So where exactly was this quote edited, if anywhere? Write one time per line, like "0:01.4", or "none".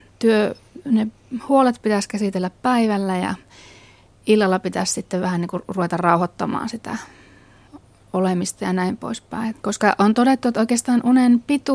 0:09.5

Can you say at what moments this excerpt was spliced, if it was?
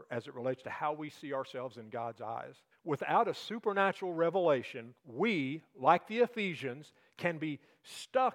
0:02.7
0:05.0

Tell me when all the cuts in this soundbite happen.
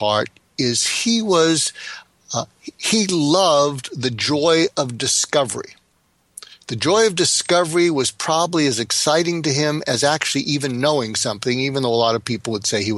none

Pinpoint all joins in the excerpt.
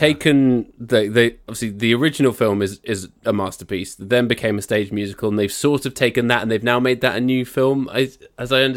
none

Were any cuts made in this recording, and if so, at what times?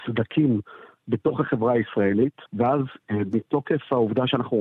0:02.5

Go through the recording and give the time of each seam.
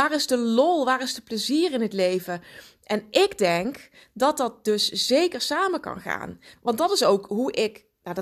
none

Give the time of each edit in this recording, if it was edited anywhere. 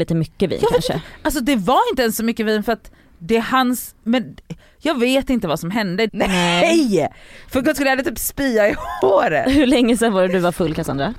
0:06.1

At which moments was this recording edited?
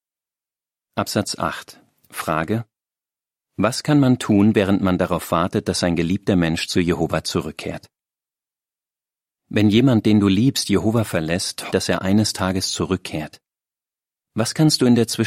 0:11.7

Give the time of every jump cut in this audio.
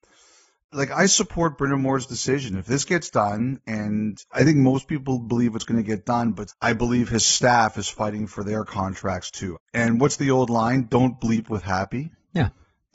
0:06.5
0:09.5

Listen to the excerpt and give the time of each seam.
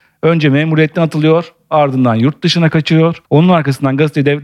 0:03.2

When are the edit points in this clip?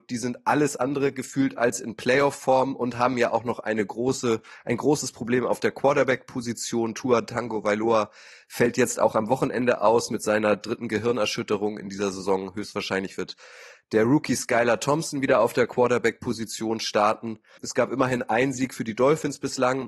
0:17.6

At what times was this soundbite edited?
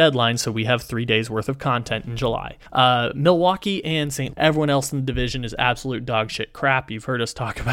0:02.7
0:04.3

